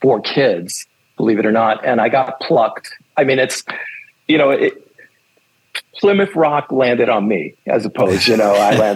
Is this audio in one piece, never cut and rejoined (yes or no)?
yes